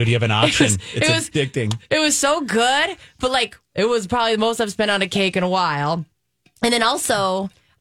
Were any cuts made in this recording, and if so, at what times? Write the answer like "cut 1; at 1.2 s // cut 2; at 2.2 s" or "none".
cut 1; at 3.6 s